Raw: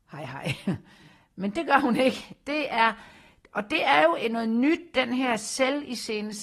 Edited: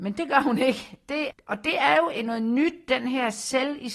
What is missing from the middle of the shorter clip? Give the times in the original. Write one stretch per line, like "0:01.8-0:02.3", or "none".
0:02.7-0:03.4